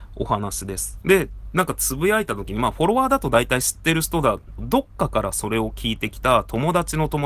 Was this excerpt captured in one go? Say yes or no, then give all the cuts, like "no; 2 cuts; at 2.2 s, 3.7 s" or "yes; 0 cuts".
no; 2 cuts; at 1.0 s, 4.6 s